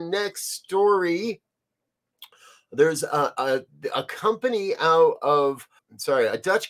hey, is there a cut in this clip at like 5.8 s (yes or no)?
yes